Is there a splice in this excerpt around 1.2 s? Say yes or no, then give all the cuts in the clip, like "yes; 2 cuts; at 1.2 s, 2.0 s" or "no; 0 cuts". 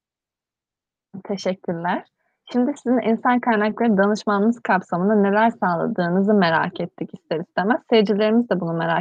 no; 0 cuts